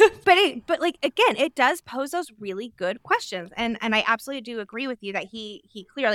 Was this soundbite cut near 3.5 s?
no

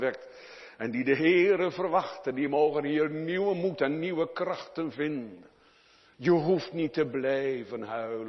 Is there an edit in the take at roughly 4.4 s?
no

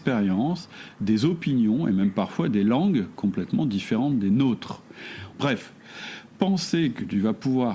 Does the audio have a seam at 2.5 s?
no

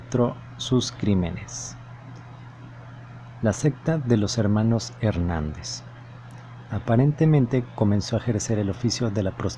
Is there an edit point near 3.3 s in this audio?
no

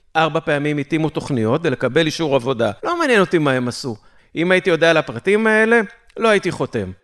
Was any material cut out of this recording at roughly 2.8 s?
yes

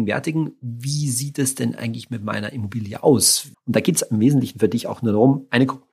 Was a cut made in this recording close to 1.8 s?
no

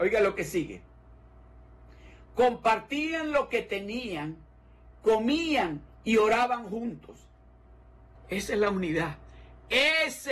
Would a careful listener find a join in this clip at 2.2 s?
no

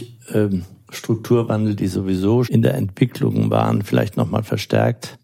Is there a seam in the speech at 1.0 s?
no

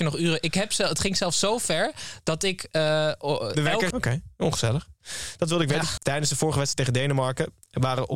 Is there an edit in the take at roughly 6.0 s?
yes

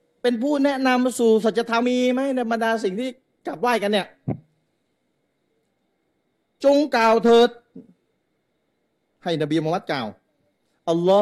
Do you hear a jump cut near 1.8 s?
yes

